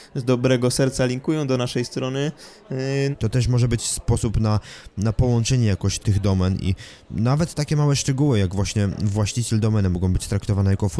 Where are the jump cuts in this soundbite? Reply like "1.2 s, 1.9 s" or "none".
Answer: 3.1 s, 6.0 s